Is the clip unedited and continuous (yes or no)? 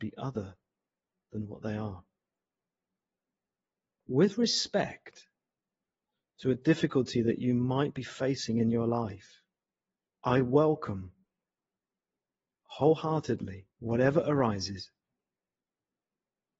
no